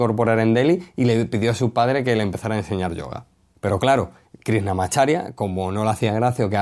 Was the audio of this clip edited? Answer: no; 0 cuts

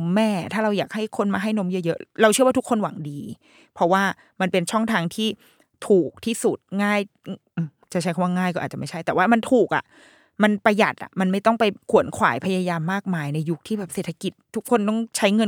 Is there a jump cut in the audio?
yes; 1 cut; at 11.8 s

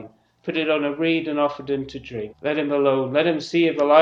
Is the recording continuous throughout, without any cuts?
no; 1 cut; at 2.3 s

